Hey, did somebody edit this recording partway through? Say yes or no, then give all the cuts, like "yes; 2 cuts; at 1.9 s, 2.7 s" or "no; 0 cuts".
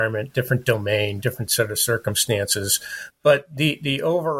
no; 0 cuts